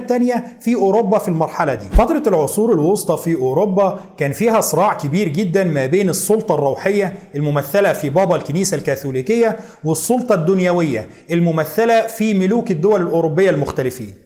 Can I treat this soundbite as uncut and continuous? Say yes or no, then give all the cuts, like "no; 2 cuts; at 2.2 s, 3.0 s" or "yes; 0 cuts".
yes; 0 cuts